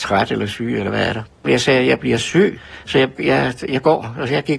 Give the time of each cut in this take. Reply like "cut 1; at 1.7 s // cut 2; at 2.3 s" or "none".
cut 1; at 3.2 s